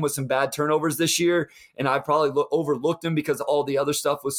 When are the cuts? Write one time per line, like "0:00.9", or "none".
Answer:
none